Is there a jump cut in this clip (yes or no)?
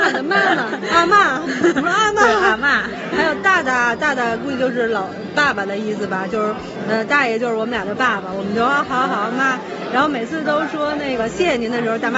no